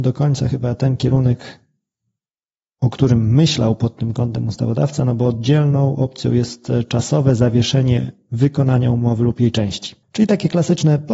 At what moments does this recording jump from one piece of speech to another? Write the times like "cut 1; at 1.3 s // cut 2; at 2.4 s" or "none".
cut 1; at 10.0 s